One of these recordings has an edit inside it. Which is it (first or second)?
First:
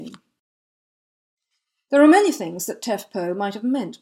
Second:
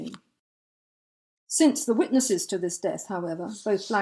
second